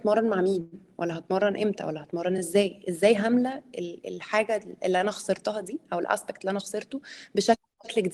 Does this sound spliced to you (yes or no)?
no